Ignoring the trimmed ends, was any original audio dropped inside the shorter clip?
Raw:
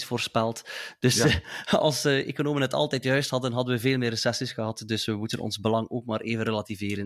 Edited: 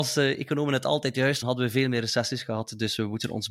yes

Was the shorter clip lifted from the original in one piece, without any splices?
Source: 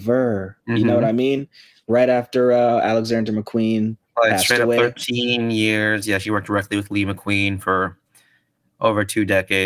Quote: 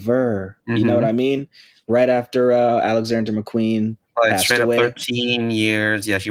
yes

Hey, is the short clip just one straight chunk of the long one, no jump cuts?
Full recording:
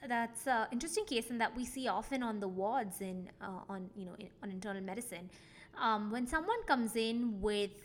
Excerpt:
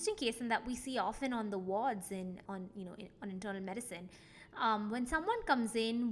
no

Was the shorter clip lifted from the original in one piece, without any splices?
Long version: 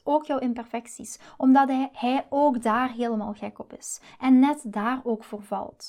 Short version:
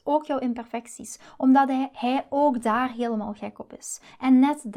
yes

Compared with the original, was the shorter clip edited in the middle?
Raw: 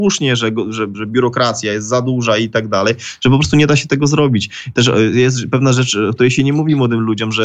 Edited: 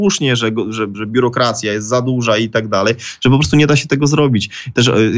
no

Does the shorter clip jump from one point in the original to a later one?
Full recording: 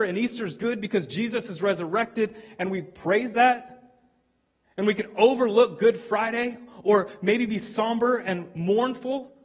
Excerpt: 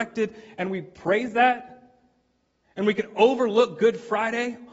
no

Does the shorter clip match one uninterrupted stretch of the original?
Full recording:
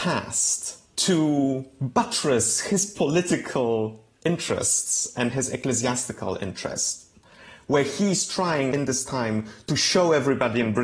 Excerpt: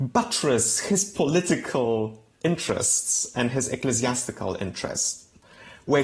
yes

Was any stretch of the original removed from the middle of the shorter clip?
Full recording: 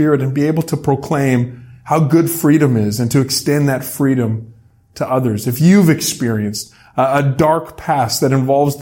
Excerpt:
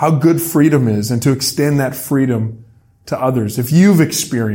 no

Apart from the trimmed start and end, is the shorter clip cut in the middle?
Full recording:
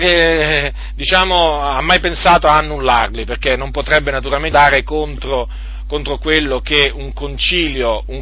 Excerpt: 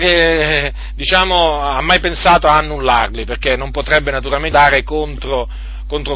no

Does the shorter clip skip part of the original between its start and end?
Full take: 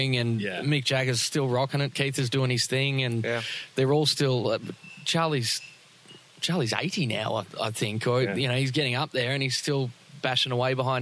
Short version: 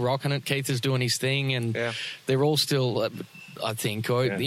yes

